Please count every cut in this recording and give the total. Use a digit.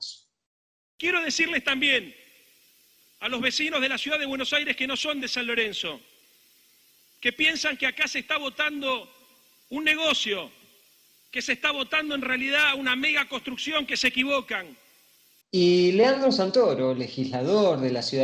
1